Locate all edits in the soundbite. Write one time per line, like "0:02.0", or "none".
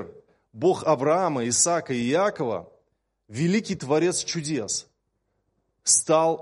none